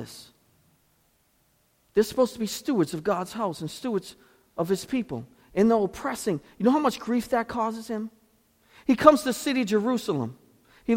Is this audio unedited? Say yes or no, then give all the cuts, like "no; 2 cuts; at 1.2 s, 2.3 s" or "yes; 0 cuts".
yes; 0 cuts